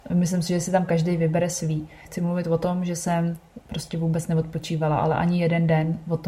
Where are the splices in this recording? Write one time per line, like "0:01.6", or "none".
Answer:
0:02.0